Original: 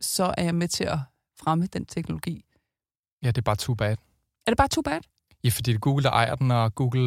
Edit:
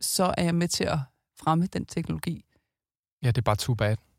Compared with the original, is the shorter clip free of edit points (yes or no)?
yes